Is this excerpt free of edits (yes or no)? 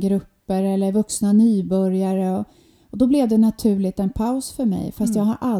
yes